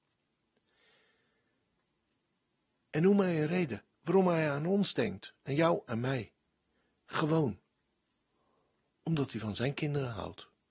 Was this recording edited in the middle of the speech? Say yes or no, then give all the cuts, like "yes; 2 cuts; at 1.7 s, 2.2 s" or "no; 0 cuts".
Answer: no; 0 cuts